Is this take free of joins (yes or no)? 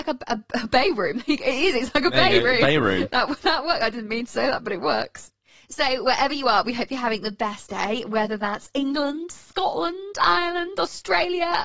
yes